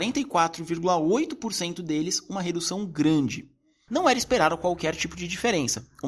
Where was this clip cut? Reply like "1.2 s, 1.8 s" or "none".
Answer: 3.9 s